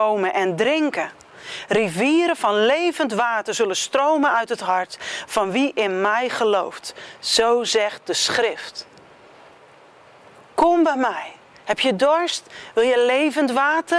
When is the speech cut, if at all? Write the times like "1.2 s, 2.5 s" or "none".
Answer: none